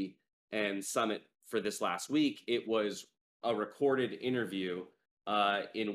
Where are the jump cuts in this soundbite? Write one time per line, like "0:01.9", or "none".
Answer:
none